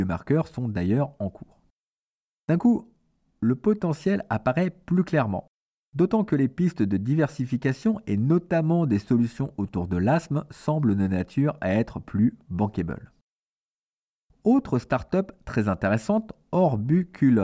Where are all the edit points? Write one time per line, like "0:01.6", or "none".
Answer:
none